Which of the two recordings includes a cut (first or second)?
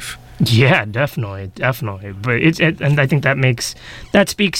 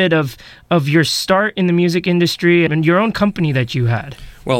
second